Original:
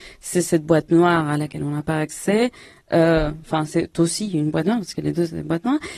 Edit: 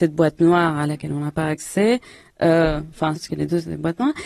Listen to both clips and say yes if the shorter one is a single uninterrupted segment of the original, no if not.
no